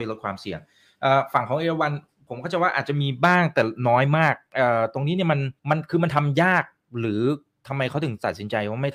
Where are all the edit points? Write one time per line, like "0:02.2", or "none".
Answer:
0:05.6

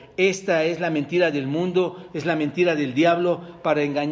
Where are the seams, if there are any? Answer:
none

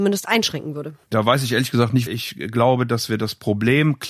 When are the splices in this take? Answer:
0:01.0
0:02.1

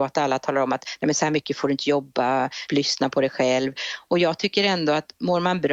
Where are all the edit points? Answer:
0:02.7

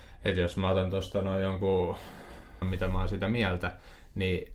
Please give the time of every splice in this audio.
0:02.6

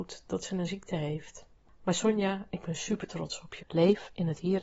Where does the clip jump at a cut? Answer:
0:03.6

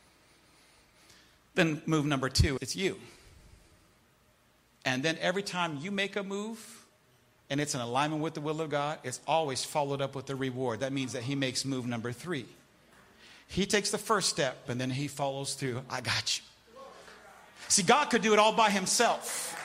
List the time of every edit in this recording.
0:02.6
0:14.7

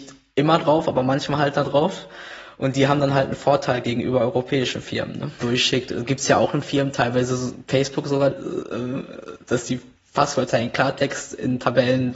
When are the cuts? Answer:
0:05.4
0:08.3

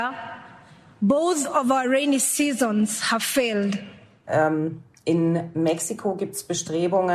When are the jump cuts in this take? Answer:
0:04.3

